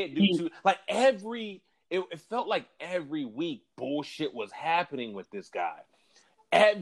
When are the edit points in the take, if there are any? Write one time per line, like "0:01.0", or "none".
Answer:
none